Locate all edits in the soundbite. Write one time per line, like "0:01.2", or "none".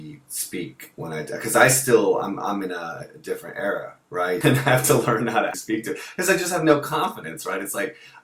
0:04.4
0:05.5